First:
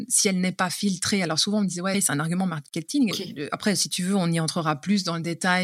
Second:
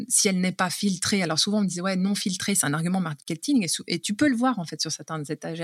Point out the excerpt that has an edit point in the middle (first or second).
first